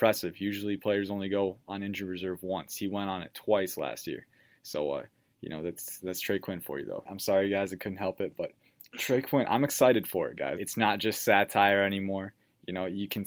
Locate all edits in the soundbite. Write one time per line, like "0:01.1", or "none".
0:07.1
0:10.6